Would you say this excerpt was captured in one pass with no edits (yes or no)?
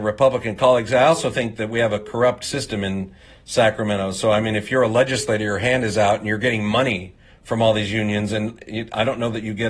yes